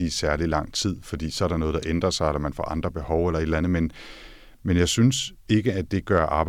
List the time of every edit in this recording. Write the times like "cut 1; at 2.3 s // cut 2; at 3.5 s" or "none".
cut 1; at 5.4 s